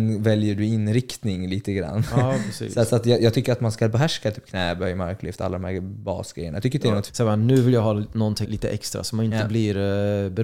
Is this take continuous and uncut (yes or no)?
no